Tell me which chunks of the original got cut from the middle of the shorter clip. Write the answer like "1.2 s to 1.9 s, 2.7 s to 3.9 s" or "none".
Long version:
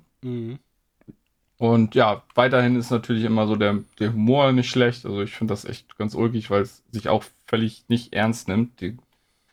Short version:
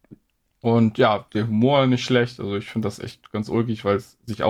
2.3 s to 3.9 s